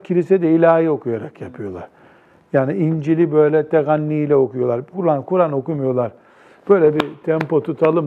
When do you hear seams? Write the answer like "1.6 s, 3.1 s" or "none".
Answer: 4.9 s

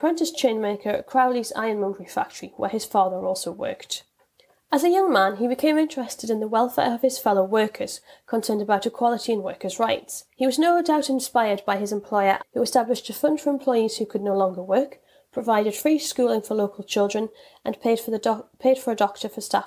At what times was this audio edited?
10.3 s, 12.4 s

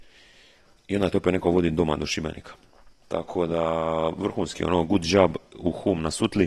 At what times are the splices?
3.0 s

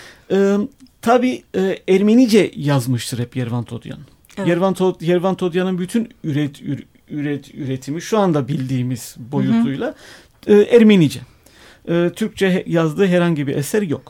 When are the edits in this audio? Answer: none

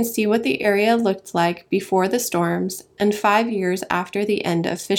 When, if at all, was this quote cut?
none

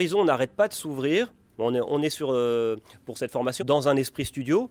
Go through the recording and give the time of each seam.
1.5 s, 3.6 s

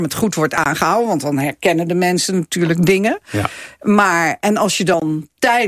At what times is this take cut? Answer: none

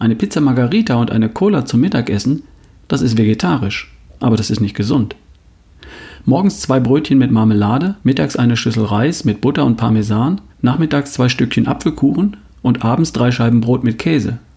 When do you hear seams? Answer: 8.0 s, 10.5 s

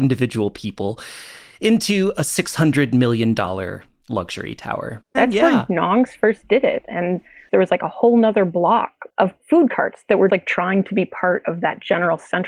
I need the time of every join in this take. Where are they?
5.1 s, 10.3 s

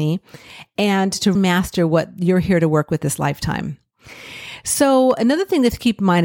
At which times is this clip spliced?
1.3 s

